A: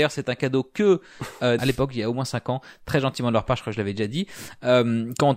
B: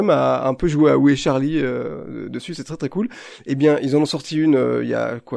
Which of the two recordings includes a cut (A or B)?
A